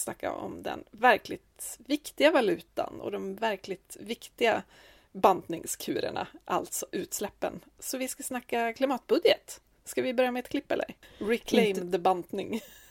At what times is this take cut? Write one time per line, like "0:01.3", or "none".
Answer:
0:11.0